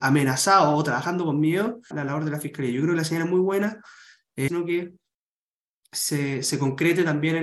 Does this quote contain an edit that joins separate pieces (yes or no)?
yes